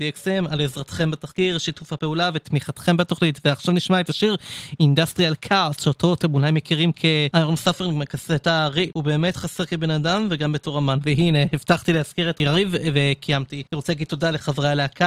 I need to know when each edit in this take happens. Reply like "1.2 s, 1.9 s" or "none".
8.9 s